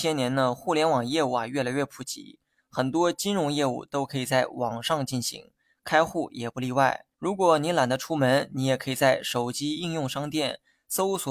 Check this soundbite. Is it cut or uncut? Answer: cut